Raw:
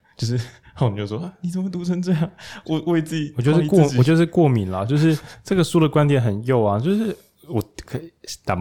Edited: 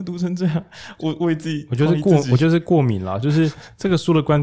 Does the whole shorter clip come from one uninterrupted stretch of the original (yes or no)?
yes